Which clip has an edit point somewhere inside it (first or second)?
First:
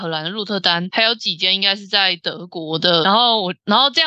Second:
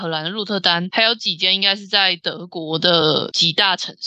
first